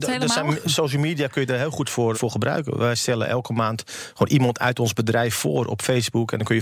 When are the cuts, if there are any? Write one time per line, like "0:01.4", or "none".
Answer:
0:02.1